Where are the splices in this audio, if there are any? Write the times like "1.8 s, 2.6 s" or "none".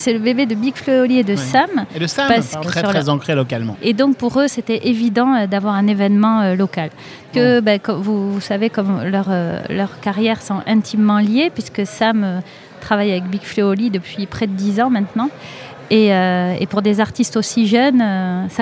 2.6 s, 3.7 s, 7.3 s

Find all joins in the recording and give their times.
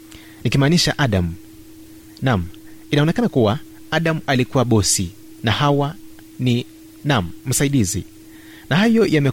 none

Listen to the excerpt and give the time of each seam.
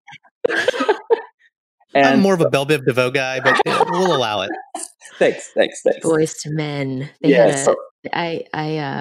none

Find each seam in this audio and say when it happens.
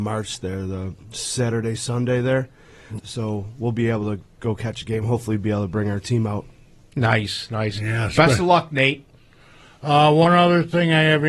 3.0 s

